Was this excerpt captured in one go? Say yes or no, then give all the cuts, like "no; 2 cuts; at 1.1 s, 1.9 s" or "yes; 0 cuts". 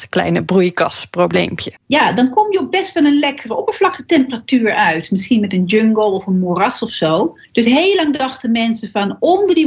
no; 2 cuts; at 1.8 s, 7.4 s